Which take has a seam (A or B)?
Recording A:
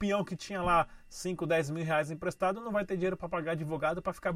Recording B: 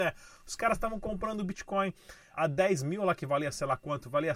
B